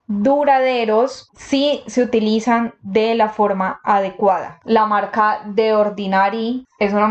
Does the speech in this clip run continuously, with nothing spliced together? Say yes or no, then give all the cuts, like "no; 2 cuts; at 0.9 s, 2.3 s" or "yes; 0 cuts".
no; 1 cut; at 4.6 s